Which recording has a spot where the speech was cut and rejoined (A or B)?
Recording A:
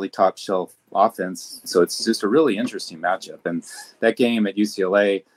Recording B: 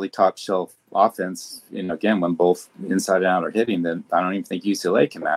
A